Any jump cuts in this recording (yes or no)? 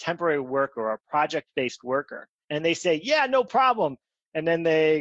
no